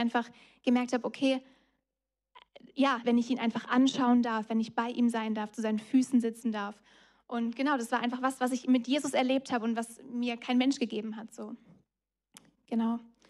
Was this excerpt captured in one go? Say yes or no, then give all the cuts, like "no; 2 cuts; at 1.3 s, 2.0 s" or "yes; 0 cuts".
no; 1 cut; at 3.0 s